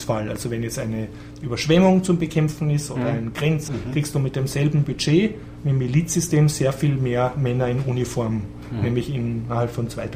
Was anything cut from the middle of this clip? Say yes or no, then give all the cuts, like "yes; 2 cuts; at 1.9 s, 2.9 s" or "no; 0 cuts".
yes; 1 cut; at 3.7 s